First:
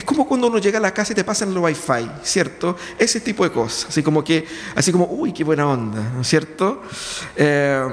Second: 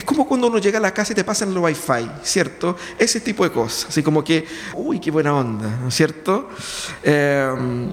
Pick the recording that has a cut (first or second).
second